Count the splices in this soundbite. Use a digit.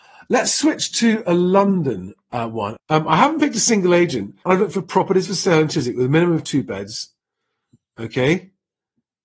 2